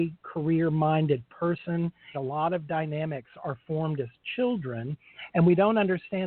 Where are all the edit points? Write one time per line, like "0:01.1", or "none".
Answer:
0:02.1